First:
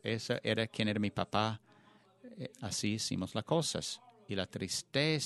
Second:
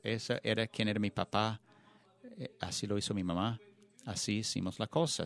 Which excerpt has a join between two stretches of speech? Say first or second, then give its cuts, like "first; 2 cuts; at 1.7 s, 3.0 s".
first; 1 cut; at 2.5 s